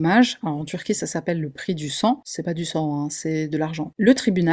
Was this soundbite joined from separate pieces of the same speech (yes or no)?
no